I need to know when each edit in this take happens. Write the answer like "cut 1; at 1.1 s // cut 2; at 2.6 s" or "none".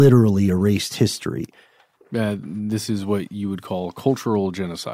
cut 1; at 2.0 s